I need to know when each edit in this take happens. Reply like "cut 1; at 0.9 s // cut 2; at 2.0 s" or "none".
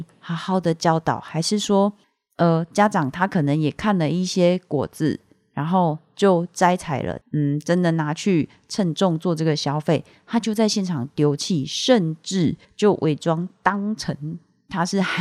cut 1; at 7.2 s